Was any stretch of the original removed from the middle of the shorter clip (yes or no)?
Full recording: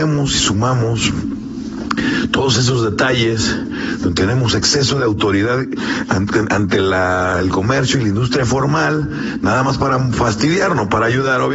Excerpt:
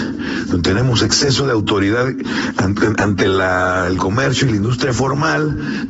no